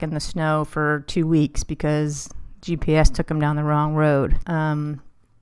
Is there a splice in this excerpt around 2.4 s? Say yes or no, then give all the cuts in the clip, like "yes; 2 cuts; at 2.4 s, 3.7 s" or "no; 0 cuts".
no; 1 cut; at 4.4 s